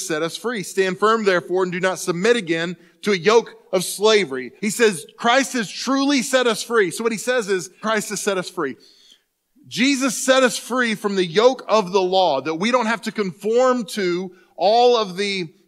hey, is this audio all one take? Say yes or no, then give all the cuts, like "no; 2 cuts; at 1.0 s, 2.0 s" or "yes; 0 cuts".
no; 2 cuts; at 4.6 s, 7.8 s